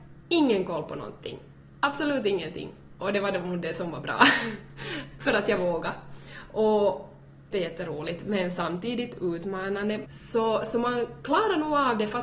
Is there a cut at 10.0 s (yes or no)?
yes